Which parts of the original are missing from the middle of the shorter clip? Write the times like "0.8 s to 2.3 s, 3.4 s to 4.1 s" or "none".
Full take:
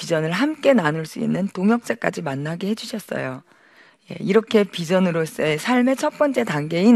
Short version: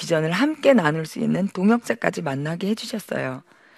none